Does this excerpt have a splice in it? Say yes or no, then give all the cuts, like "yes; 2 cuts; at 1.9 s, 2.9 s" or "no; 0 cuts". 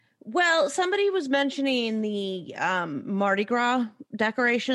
no; 0 cuts